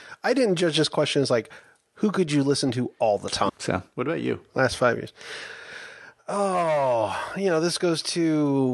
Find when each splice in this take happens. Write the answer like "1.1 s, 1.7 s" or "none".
3.5 s